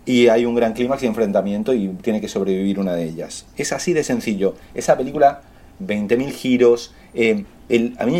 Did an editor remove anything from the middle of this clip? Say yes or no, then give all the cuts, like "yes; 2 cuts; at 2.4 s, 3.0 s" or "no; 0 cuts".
no; 0 cuts